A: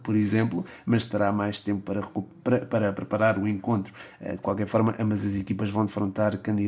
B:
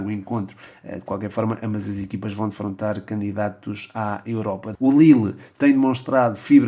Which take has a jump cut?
B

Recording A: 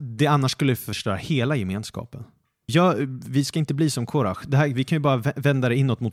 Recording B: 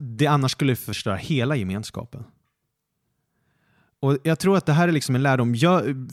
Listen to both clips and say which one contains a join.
A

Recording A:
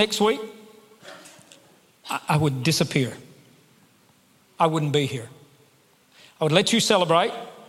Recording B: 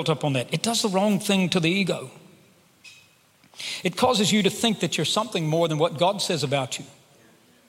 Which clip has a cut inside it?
A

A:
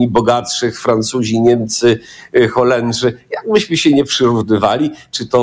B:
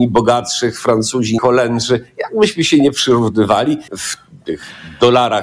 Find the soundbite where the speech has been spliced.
B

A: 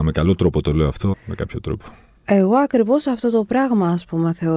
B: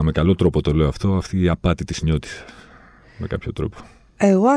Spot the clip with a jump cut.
A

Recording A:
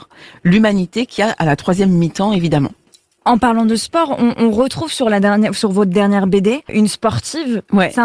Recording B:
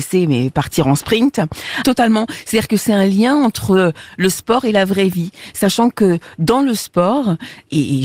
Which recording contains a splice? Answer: B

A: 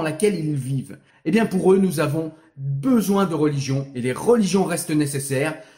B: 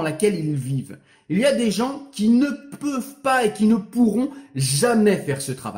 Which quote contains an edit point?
A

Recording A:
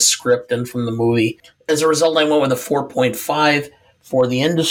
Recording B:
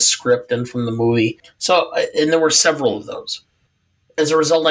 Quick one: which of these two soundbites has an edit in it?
A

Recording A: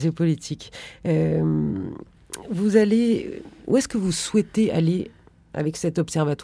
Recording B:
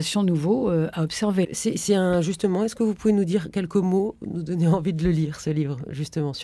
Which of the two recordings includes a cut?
B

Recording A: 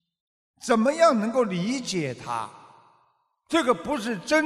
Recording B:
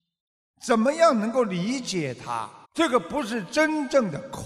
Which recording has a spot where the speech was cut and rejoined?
B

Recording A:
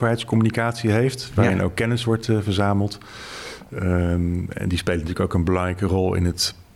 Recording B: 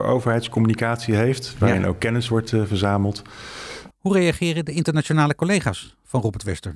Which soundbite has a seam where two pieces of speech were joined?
B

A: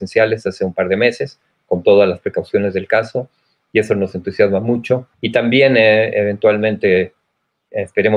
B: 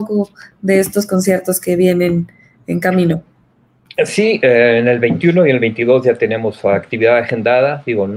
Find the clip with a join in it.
A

